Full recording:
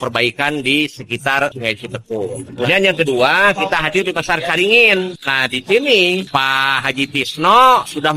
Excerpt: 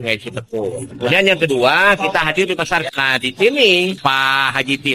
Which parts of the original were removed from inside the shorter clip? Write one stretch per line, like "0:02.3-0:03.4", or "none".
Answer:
0:04.5-0:05.2